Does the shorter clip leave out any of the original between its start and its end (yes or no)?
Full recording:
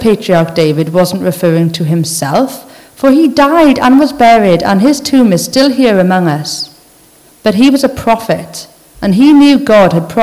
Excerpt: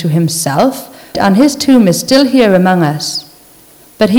yes